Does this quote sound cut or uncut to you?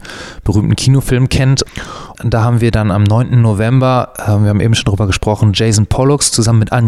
cut